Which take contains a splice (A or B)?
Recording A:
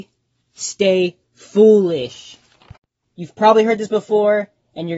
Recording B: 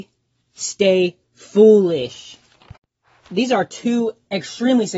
A